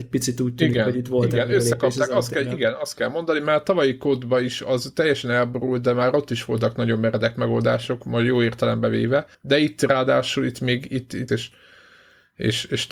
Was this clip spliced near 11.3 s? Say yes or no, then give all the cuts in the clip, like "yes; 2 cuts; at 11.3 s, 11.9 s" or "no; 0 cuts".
yes; 2 cuts; at 9.3 s, 11.3 s